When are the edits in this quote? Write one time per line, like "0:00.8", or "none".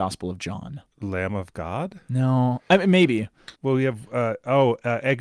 0:00.9
0:03.5